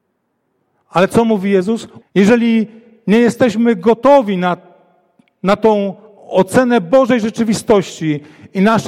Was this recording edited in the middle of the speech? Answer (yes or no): yes